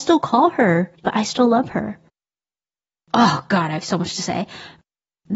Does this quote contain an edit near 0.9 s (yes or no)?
yes